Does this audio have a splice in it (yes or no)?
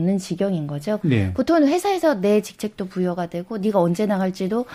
yes